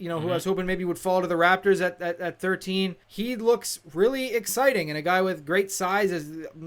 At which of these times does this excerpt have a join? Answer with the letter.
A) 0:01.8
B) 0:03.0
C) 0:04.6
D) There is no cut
B